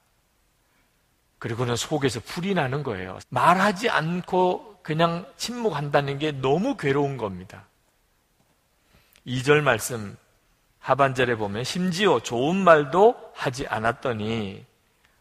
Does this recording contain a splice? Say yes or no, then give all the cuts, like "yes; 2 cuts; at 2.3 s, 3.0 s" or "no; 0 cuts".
yes; 1 cut; at 3.2 s